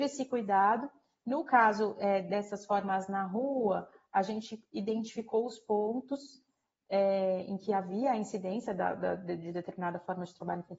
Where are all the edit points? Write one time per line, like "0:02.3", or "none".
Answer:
none